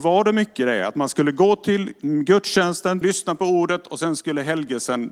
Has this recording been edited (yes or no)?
yes